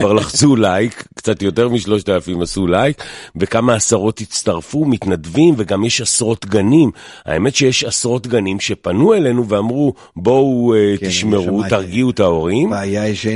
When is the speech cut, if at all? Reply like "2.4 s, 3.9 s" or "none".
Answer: none